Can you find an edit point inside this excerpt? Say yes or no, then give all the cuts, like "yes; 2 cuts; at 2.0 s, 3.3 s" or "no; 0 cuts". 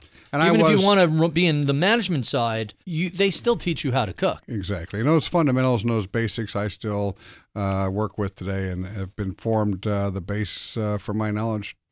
yes; 2 cuts; at 2.8 s, 4.4 s